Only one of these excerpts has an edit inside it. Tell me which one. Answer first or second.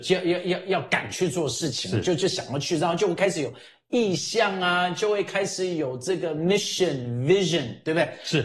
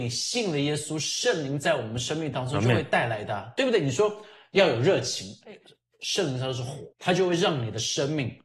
second